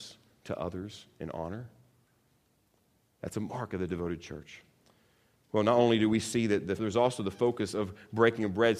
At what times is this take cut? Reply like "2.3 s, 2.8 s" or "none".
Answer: 6.8 s